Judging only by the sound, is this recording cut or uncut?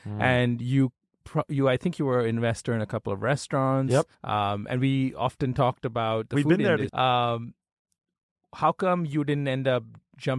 cut